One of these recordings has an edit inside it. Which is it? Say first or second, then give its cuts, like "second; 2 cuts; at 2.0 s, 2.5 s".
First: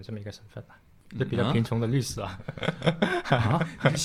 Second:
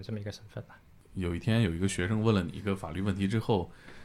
first; 1 cut; at 1.1 s